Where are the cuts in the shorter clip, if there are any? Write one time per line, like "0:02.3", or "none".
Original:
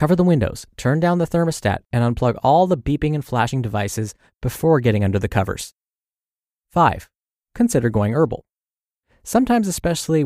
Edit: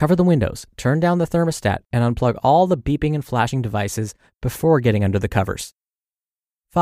none

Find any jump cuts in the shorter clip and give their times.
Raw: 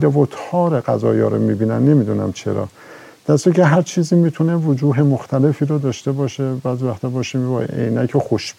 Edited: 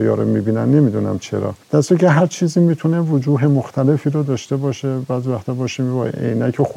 0:01.6

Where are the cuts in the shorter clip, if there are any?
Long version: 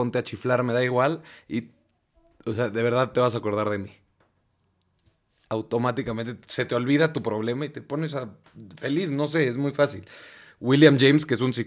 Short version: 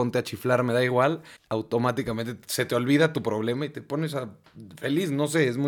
0:01.4

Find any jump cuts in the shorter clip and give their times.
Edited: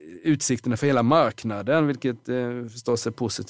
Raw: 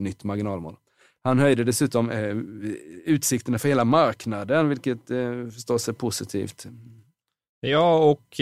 none

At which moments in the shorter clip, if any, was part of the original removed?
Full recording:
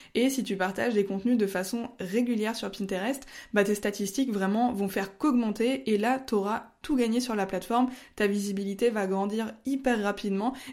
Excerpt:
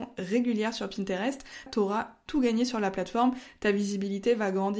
0:01.7

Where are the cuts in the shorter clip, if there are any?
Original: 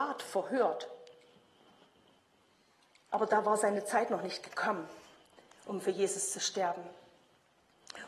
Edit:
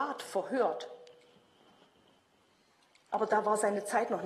none

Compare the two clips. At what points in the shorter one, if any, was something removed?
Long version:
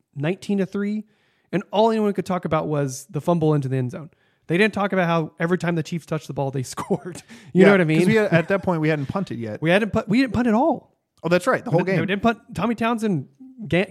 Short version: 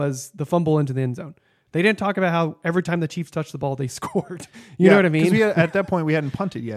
none

